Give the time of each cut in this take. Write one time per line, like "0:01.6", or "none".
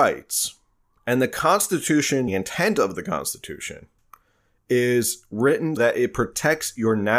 0:02.3
0:05.8